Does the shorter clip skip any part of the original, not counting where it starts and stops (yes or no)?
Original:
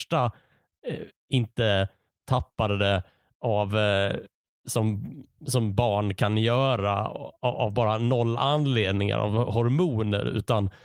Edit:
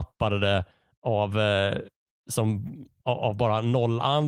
yes